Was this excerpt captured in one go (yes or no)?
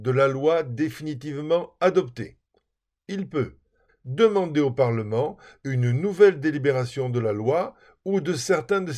no